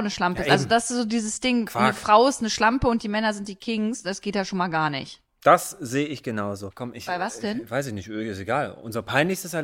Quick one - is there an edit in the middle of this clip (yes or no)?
yes